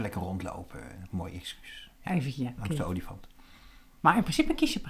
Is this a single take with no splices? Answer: no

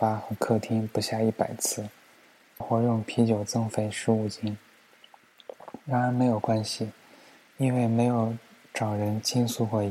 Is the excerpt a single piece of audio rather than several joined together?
no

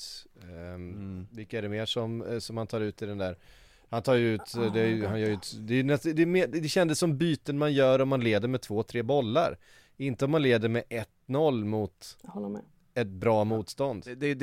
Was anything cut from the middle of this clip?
no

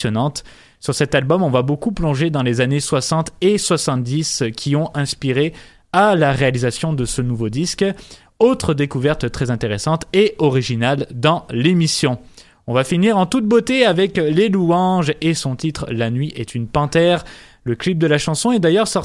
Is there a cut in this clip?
no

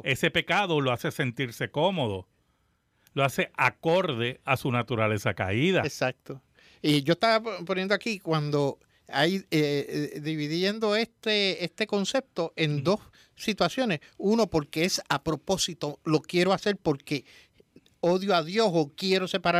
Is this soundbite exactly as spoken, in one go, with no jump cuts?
yes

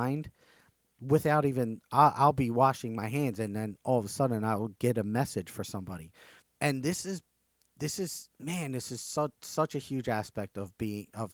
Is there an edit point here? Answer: yes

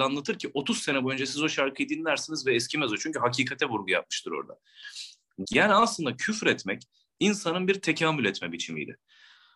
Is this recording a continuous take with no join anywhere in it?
no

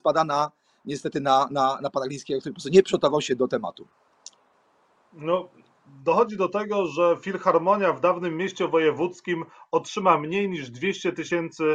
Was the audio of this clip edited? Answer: no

